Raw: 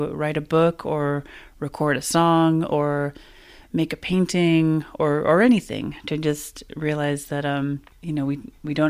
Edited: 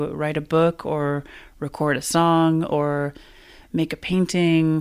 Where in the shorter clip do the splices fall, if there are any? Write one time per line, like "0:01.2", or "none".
none